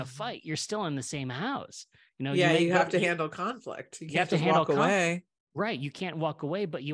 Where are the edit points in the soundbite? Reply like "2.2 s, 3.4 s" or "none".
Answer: none